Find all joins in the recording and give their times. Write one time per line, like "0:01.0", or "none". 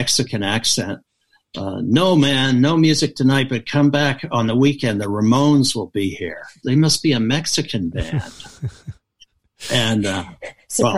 0:06.6